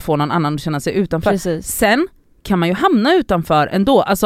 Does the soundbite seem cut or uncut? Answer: uncut